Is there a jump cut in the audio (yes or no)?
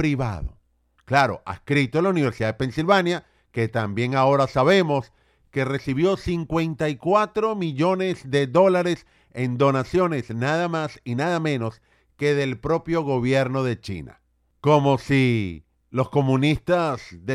no